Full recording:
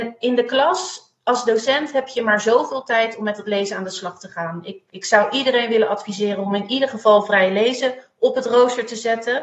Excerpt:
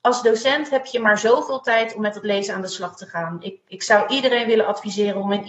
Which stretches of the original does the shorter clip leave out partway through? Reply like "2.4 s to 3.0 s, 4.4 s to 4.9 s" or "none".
none